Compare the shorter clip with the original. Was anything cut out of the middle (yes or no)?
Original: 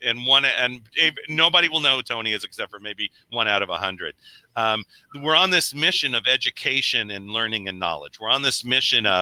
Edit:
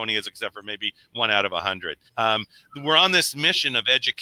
yes